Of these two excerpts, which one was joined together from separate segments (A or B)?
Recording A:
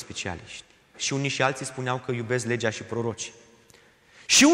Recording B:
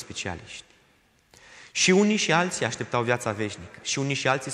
A